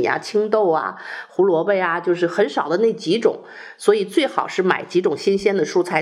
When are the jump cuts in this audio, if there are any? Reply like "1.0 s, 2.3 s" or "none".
none